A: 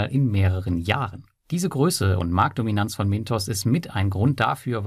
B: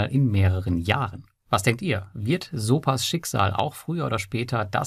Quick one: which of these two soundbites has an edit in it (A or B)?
B